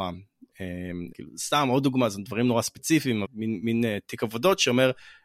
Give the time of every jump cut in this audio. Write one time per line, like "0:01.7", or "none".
0:01.1
0:03.2

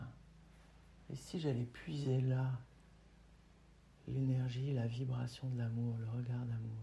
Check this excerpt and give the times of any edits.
none

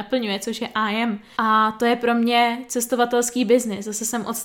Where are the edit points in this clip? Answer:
0:01.4

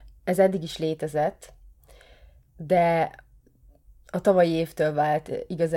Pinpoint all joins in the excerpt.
none

